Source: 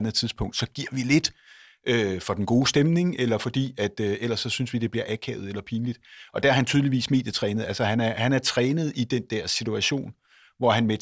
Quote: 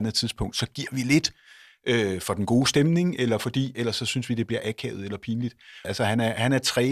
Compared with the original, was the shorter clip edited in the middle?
yes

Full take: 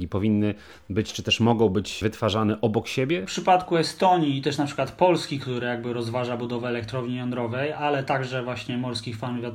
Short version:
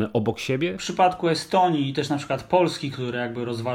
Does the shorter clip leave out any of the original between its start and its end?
no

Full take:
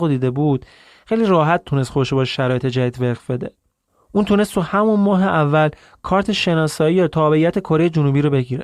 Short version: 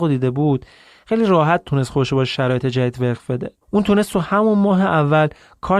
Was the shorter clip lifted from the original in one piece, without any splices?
no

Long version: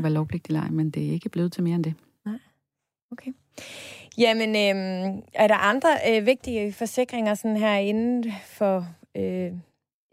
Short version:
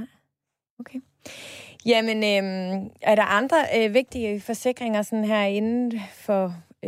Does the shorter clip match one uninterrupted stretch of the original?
yes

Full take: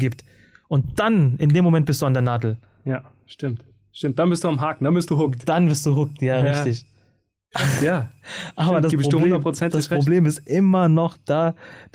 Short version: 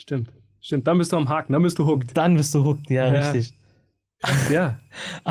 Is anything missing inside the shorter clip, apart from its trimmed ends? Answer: no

